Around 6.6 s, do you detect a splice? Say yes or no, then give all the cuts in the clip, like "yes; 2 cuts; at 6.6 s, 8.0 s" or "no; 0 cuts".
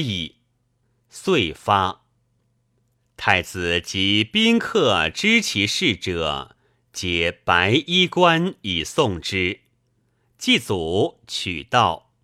no; 1 cut; at 10.2 s